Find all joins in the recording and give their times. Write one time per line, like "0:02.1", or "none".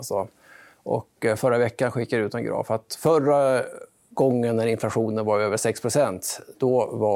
none